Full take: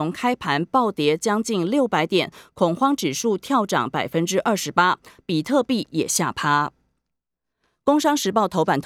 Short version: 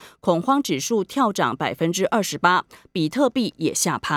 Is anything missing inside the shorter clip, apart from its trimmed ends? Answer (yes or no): no